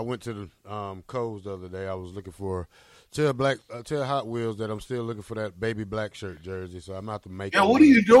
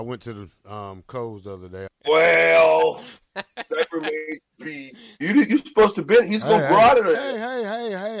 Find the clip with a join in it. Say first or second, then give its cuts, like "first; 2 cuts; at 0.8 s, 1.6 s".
second; 2 cuts; at 1.9 s, 5.2 s